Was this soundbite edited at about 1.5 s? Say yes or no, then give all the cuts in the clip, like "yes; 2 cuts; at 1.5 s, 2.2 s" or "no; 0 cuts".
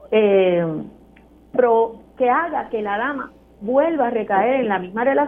yes; 1 cut; at 1.5 s